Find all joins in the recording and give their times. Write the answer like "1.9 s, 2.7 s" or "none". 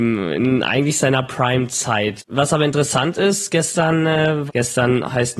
2.2 s, 4.5 s